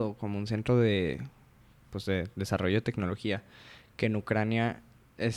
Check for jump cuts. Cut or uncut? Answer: uncut